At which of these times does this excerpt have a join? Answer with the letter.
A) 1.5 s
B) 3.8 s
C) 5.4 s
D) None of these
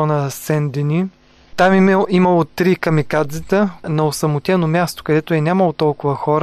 B